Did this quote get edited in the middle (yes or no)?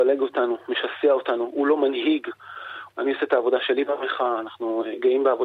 yes